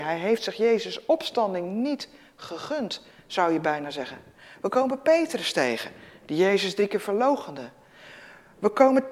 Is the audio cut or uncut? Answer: uncut